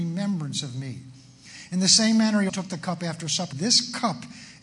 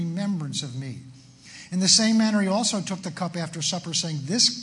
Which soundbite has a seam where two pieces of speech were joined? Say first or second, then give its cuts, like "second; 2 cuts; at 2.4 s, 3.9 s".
first; 2 cuts; at 2.5 s, 3.5 s